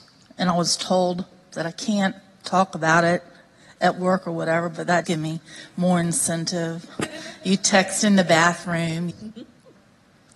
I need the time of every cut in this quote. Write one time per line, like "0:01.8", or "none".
0:05.0
0:09.1